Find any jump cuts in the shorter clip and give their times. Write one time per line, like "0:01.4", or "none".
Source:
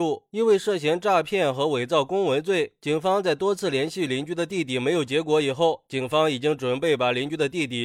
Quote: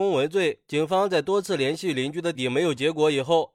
0:02.3